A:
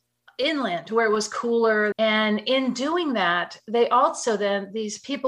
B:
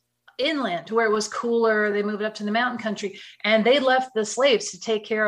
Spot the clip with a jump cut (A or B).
A